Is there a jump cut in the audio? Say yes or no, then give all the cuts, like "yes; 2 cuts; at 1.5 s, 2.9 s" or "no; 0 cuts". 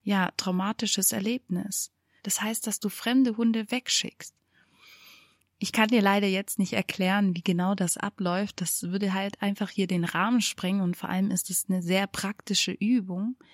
yes; 1 cut; at 2.2 s